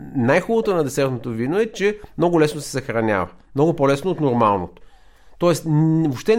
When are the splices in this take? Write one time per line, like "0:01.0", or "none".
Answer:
none